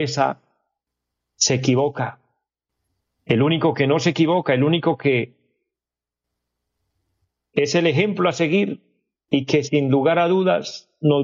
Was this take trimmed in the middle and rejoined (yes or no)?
no